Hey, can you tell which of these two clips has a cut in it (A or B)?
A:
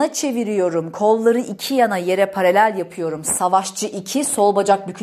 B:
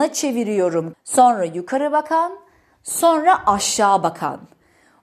B